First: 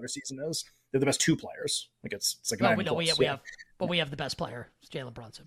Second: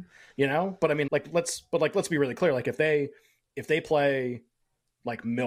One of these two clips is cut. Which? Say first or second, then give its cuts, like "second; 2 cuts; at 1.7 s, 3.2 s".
second; 1 cut; at 1.1 s